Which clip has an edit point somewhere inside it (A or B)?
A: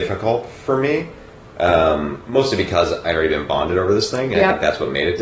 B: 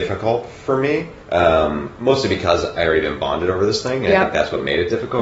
B